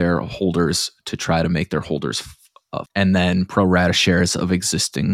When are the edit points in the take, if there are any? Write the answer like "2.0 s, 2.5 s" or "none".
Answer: 2.9 s